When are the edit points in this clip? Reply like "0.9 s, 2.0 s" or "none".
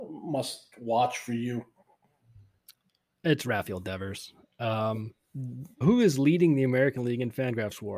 5.8 s